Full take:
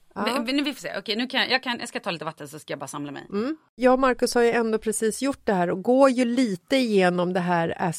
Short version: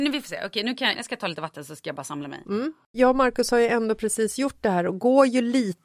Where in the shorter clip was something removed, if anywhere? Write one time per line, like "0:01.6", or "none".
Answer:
0:00.9